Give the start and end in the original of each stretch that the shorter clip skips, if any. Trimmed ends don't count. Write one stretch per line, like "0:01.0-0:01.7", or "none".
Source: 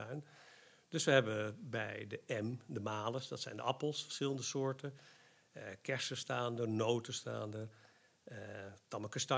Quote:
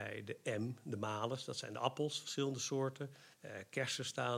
0:05.2-0:05.4